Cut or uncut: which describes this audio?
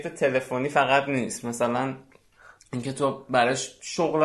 uncut